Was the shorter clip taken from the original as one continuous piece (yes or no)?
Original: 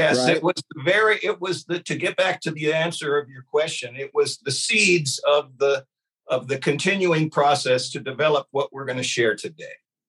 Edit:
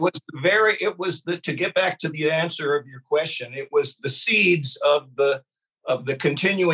yes